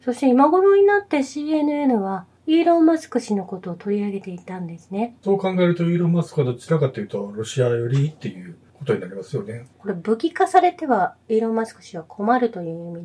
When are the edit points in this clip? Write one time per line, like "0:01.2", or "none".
0:05.2
0:09.7